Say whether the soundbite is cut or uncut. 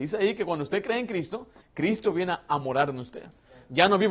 cut